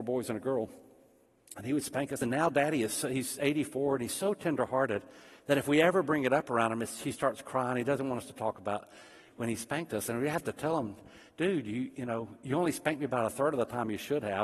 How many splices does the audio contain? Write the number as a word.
zero